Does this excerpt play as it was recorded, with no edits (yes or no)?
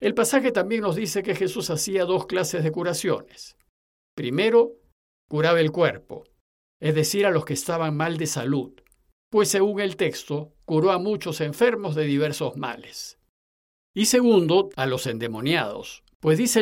no